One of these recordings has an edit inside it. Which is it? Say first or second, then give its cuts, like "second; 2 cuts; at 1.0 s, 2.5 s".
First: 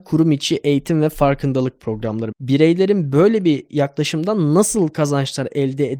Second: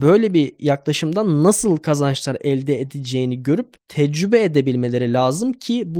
first; 1 cut; at 2.3 s